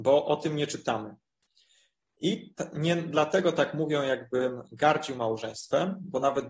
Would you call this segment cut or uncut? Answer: uncut